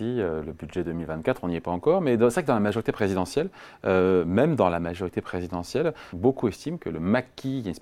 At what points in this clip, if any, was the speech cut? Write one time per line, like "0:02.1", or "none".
0:06.1